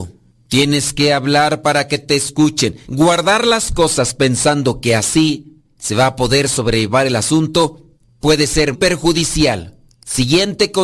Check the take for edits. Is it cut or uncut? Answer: cut